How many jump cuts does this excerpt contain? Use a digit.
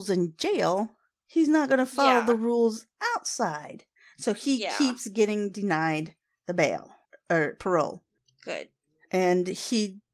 0